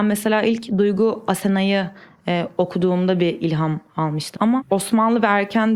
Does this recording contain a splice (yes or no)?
yes